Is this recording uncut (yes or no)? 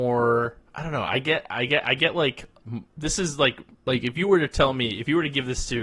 yes